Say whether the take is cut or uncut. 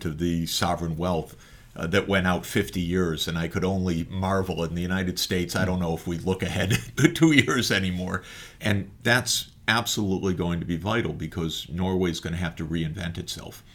cut